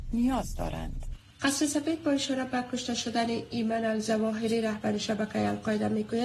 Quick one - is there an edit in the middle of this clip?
yes; 1 cut; at 1.3 s

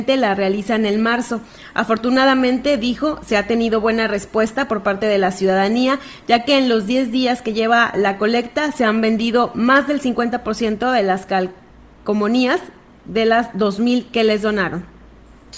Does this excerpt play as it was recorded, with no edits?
yes; 0 cuts

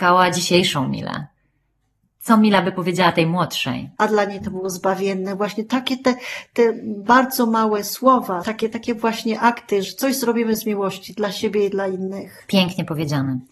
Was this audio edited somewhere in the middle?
yes; 3 cuts; at 4.0 s, 8.4 s, 9.8 s

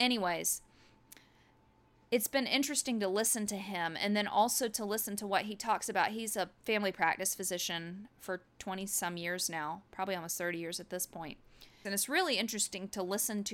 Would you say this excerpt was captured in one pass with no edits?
no; 1 cut; at 11.9 s

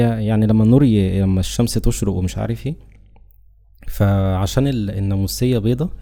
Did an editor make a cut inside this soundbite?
no; 0 cuts

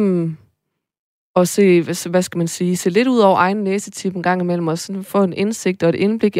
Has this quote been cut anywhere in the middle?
no; 0 cuts

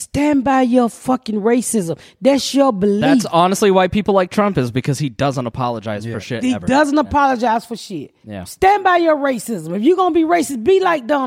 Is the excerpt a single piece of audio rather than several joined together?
yes; 0 cuts

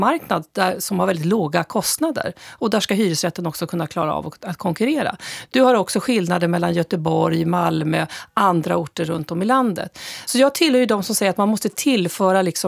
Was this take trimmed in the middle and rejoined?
no; 0 cuts

